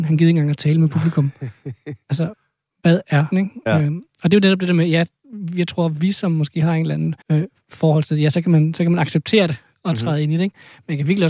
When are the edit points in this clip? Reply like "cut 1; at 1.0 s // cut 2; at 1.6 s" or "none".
cut 1; at 3.3 s // cut 2; at 7.2 s